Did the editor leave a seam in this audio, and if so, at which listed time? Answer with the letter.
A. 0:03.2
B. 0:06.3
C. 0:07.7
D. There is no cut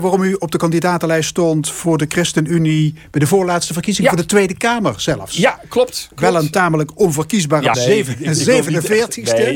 C